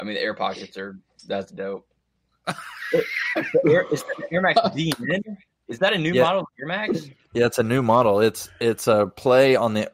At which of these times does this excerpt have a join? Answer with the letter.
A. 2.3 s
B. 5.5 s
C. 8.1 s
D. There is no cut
D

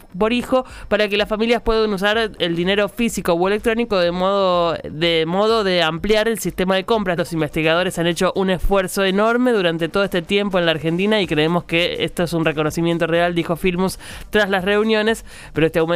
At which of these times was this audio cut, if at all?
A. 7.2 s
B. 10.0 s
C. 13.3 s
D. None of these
A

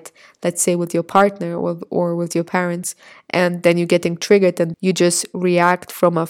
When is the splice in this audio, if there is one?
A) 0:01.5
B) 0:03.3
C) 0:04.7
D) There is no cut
C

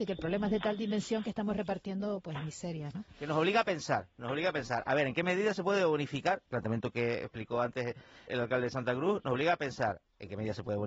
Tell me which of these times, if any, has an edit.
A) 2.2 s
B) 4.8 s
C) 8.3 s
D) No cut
C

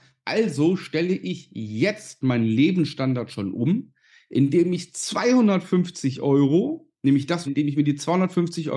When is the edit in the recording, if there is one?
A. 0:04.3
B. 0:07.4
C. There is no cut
B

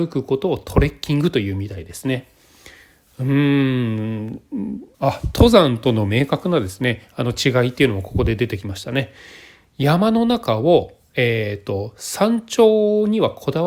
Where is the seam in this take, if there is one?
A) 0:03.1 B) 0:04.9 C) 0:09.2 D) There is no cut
B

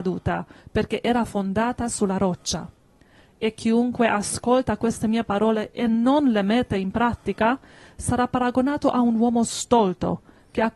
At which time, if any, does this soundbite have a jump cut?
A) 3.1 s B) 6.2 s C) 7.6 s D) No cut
D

